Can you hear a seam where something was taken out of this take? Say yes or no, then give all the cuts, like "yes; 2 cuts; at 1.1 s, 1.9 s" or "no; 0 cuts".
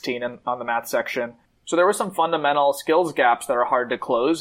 no; 0 cuts